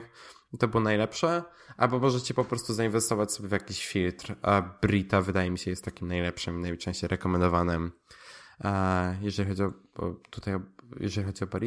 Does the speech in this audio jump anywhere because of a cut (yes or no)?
no